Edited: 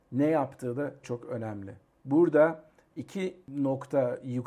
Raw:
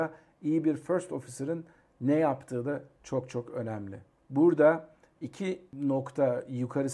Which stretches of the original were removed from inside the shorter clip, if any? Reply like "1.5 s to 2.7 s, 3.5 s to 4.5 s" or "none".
2.9 s to 3.3 s